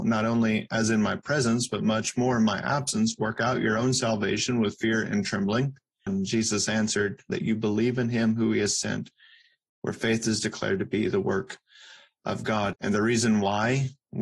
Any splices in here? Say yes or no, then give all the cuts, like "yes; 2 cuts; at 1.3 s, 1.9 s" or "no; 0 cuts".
yes; 3 cuts; at 6.1 s, 7.3 s, 12.7 s